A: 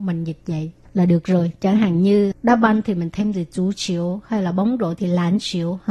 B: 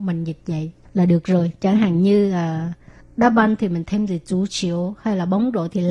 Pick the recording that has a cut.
A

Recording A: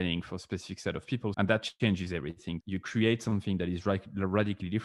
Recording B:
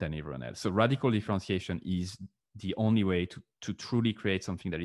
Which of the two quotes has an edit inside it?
A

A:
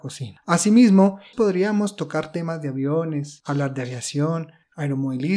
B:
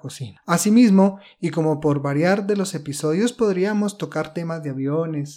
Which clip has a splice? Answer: A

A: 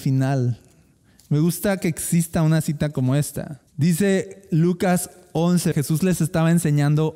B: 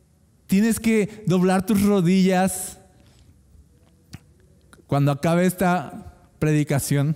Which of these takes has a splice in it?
A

